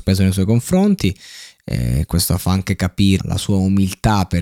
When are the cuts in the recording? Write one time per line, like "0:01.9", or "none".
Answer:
0:03.2